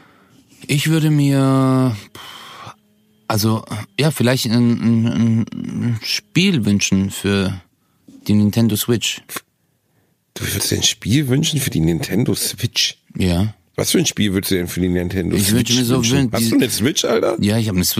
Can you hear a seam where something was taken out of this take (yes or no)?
no